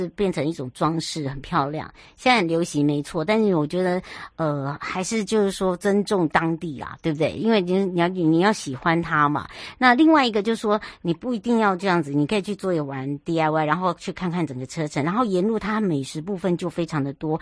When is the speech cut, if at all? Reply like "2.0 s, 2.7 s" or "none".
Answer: none